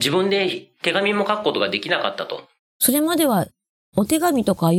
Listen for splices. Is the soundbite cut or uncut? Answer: cut